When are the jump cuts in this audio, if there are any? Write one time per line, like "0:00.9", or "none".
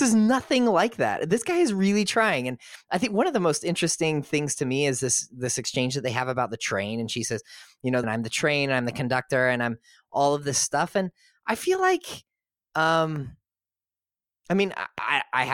0:08.0